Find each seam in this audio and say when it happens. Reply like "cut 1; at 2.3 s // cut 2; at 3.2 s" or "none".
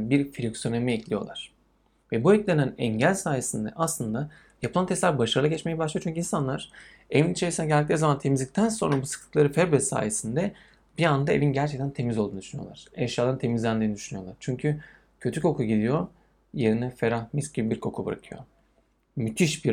none